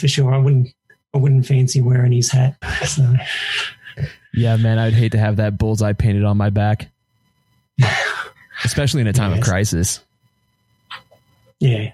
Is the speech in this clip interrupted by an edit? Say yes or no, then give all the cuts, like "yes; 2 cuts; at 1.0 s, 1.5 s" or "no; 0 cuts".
yes; 1 cut; at 2.6 s